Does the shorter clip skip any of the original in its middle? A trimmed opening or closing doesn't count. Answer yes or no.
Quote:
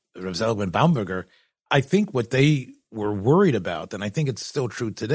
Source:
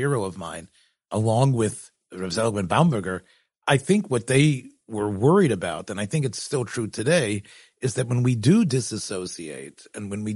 no